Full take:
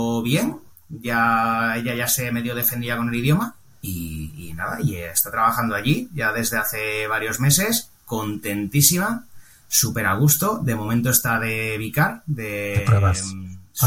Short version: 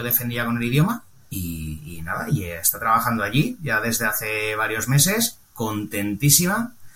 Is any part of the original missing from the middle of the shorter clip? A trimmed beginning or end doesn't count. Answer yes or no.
no